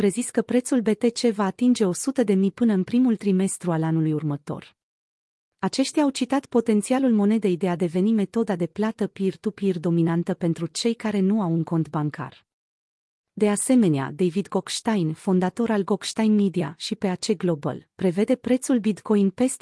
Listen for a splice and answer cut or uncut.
uncut